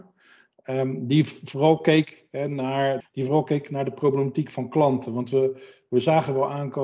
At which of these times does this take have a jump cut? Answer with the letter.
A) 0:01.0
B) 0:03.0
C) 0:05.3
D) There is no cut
B